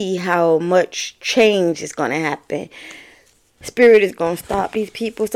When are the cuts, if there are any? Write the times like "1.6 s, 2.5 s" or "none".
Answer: 3.6 s